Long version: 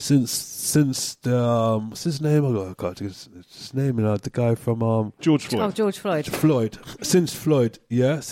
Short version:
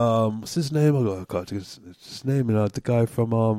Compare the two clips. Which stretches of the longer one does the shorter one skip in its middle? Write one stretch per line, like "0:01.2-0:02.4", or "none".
none